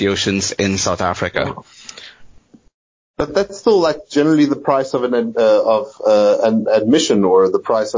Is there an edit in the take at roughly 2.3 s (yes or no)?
no